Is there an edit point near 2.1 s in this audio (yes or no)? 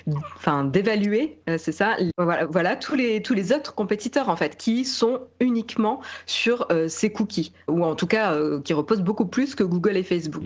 yes